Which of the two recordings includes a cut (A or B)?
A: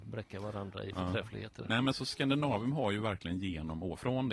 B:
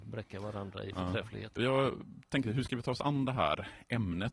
B